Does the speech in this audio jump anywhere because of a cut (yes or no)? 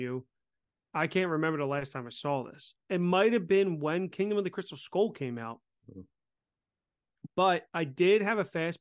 no